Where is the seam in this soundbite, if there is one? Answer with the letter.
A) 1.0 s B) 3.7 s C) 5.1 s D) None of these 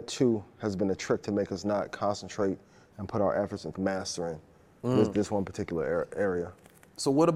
B